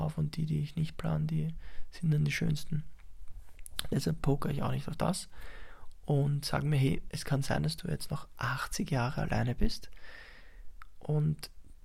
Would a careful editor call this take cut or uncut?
uncut